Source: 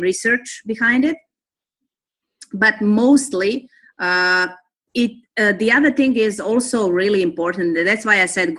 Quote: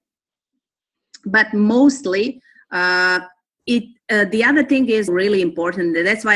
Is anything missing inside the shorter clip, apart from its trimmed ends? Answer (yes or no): yes